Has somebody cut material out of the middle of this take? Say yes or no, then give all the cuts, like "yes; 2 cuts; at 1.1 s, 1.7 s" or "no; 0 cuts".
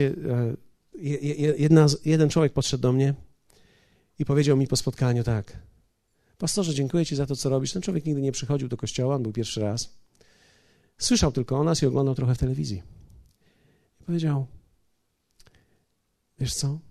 no; 0 cuts